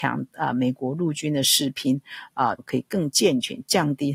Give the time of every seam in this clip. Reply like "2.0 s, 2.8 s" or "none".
2.6 s